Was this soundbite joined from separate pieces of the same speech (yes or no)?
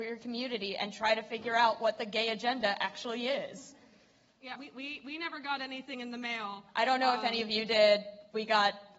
yes